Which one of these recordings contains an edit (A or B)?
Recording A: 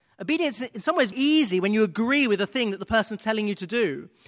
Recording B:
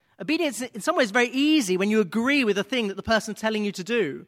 A